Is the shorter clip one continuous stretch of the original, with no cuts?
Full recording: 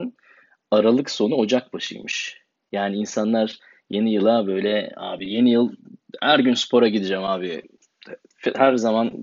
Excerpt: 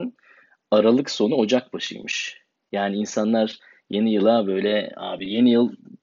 yes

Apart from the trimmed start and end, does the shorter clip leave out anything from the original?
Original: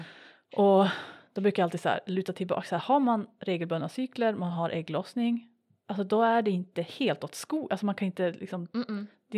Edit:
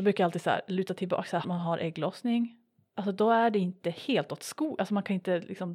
yes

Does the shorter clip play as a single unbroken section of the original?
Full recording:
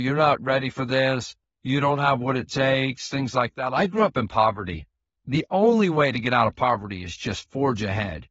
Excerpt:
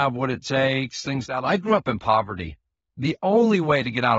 no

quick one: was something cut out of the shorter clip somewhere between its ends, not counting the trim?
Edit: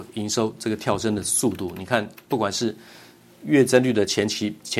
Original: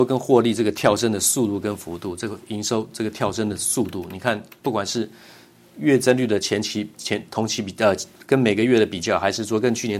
no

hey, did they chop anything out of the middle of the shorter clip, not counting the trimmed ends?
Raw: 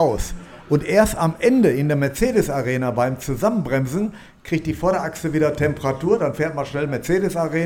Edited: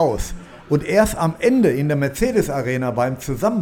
no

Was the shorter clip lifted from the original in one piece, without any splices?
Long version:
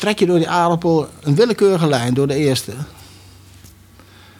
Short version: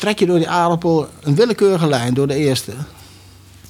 yes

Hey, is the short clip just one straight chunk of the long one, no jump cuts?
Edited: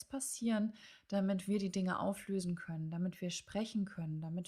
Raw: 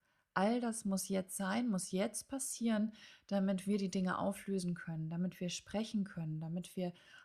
yes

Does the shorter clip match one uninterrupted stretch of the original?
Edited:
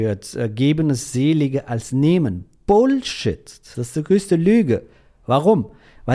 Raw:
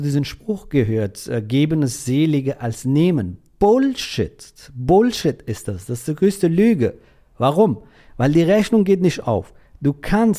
no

